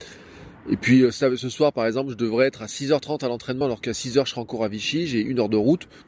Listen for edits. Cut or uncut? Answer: uncut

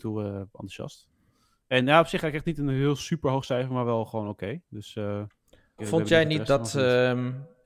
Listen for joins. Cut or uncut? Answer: cut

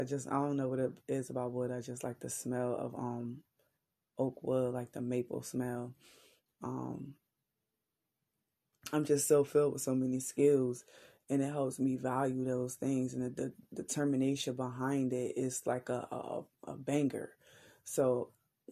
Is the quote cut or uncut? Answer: uncut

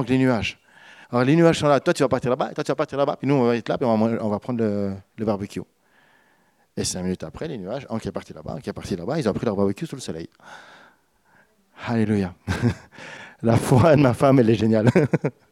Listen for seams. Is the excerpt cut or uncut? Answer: uncut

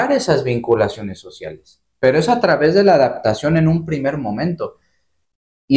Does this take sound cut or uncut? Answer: uncut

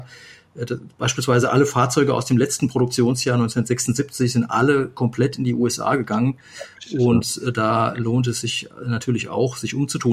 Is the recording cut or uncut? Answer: uncut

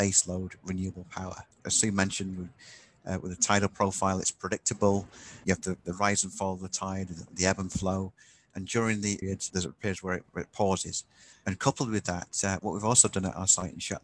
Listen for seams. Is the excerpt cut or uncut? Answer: cut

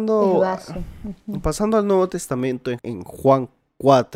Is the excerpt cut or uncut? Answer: cut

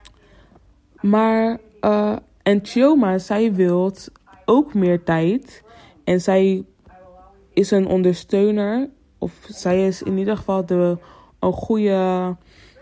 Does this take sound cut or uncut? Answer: uncut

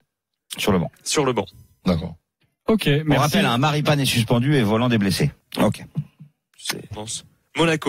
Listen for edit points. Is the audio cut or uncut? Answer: cut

